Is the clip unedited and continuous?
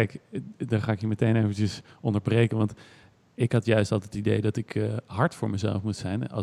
yes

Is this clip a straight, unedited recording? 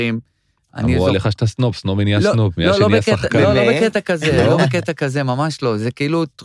yes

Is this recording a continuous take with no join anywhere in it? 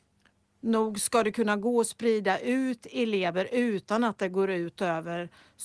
yes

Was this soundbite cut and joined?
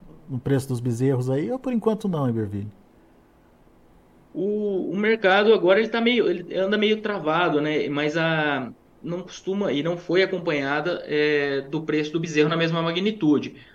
yes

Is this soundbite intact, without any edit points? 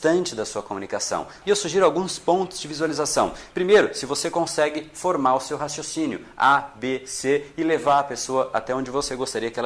no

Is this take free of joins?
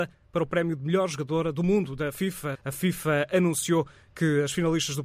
no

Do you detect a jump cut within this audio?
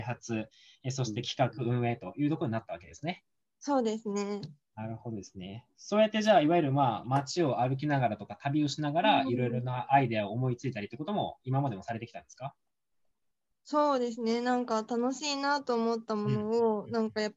no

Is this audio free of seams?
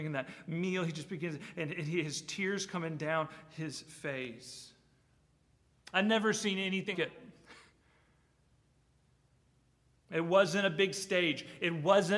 no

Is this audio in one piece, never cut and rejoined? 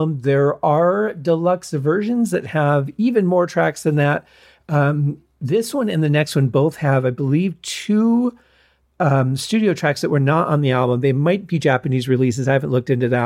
yes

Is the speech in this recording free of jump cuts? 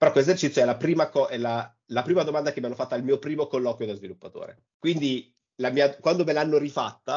no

